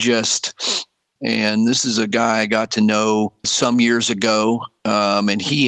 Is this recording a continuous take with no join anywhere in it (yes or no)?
no